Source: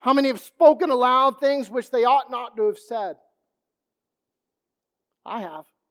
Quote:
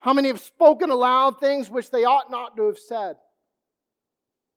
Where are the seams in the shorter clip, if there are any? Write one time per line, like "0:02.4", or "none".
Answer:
none